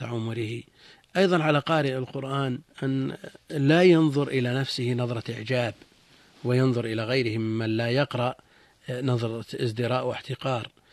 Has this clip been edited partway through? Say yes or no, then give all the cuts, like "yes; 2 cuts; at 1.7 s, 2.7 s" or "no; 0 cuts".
yes; 1 cut; at 2.7 s